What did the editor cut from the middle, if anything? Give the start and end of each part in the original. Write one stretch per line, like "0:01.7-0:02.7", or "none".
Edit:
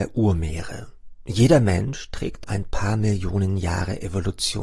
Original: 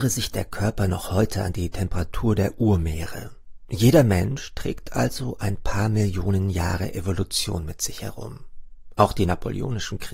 0:04.9-0:05.4

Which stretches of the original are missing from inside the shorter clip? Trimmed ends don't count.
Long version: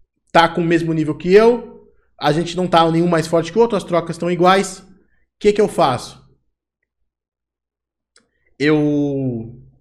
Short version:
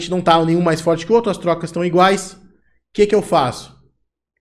none

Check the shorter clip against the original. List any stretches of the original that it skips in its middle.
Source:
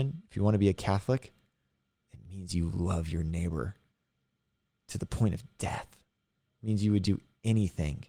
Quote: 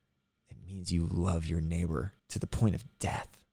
0:03.8-0:04.8

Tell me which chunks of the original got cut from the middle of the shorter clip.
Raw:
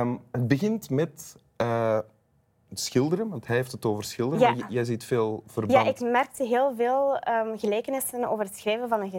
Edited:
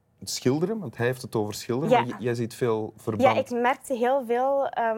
none

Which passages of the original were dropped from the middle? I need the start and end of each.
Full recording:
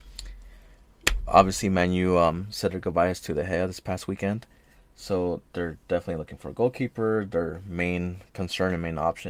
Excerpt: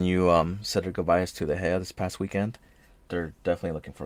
0:04.9-0:05.5

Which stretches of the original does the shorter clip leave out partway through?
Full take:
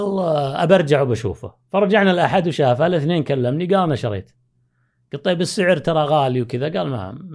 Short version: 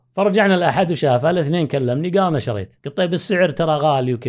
0:04.4-0:05.1

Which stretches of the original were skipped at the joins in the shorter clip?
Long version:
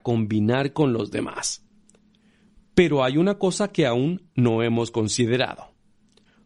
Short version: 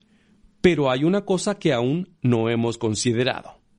none

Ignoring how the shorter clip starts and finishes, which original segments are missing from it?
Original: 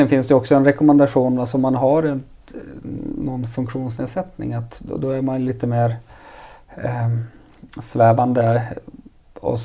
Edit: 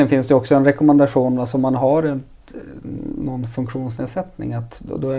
none

